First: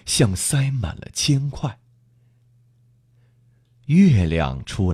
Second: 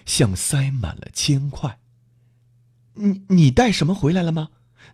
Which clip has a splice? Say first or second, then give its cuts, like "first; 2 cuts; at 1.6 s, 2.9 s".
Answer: second; 1 cut; at 2.9 s